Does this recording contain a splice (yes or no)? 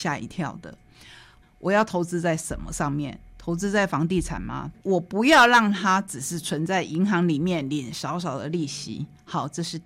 yes